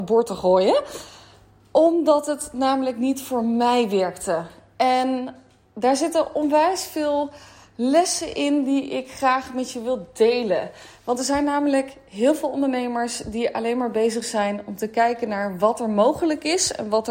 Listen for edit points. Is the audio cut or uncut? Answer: uncut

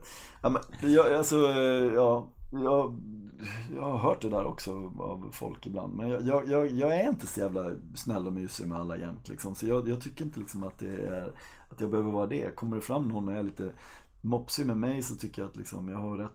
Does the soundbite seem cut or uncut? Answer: uncut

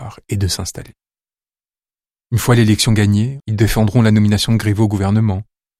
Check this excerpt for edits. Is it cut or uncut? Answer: cut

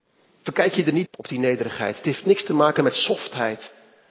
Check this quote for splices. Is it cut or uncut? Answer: cut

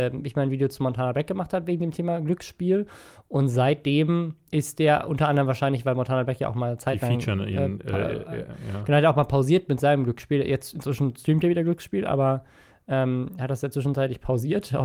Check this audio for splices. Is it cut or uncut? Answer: cut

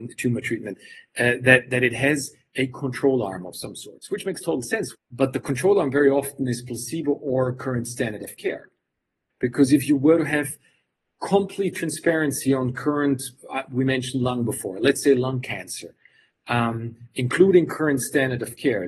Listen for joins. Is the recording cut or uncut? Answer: cut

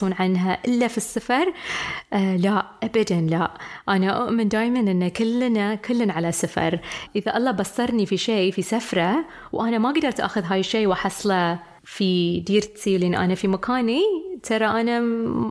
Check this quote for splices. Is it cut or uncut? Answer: uncut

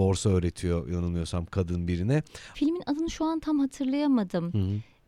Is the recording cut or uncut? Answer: cut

